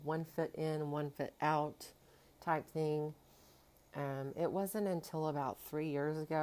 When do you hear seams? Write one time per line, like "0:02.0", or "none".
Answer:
none